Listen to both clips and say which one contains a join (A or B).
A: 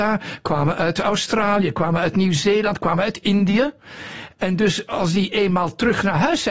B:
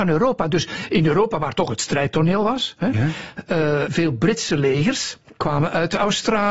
B